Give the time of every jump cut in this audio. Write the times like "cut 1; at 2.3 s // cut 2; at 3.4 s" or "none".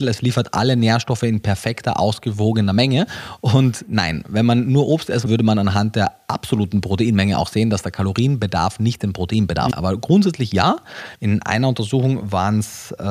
cut 1; at 5.3 s // cut 2; at 9.7 s // cut 3; at 11.2 s